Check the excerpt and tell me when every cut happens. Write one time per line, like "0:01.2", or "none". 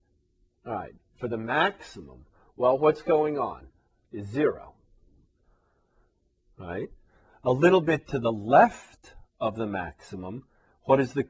0:04.1